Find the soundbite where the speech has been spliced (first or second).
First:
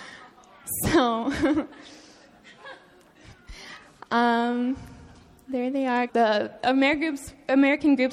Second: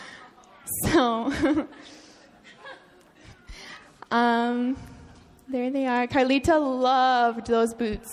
first